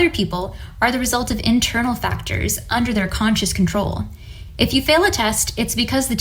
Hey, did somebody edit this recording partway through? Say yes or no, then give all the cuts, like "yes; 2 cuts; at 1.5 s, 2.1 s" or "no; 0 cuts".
no; 0 cuts